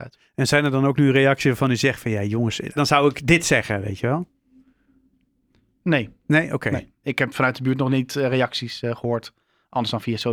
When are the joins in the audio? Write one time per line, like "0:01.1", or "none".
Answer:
0:02.8
0:07.0

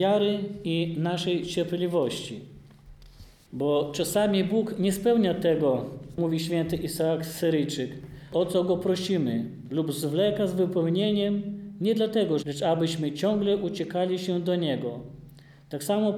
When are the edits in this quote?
0:12.4

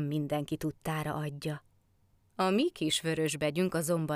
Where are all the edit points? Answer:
0:02.3

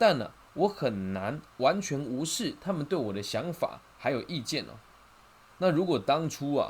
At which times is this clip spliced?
0:05.5

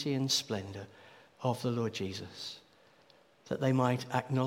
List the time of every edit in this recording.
none

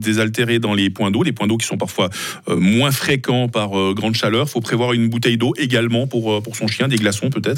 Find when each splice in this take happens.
none

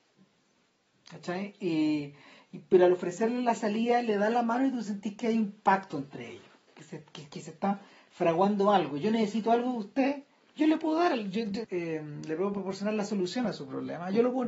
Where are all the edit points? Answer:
0:11.6

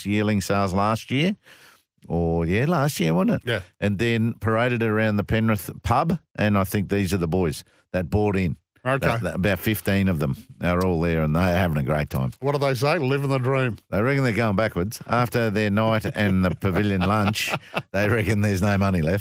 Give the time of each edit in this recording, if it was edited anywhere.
none

